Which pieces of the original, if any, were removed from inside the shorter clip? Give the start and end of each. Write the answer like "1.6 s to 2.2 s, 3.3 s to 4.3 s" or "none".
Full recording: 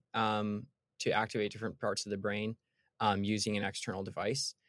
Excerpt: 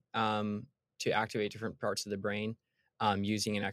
none